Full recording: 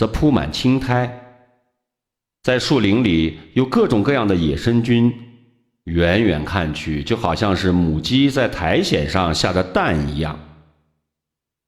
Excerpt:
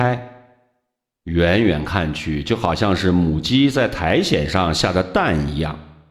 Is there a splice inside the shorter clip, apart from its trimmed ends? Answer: yes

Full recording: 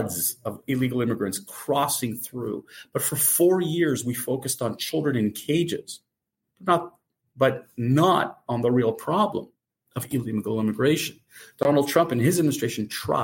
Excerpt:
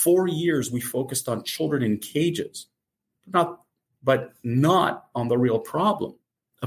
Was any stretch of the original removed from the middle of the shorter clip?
no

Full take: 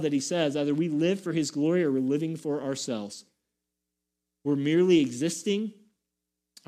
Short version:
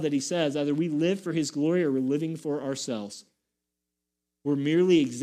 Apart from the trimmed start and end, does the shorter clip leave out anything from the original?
no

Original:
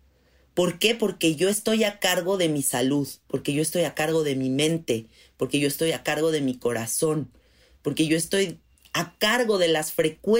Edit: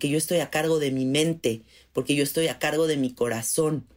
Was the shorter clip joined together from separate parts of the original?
no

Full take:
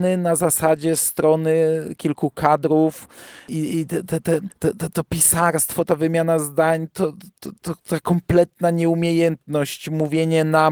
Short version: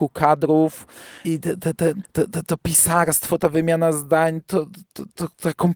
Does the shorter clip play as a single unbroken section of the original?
no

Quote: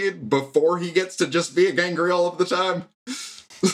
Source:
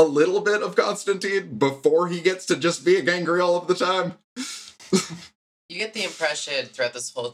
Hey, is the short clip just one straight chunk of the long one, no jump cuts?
yes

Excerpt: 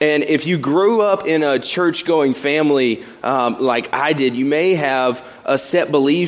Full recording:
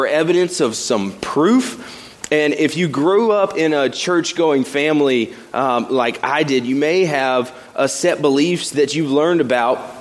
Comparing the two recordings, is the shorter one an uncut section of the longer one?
yes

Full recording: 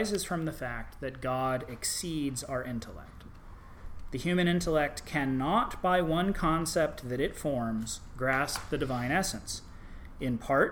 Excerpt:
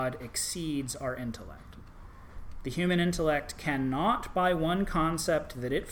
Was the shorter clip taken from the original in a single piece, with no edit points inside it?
yes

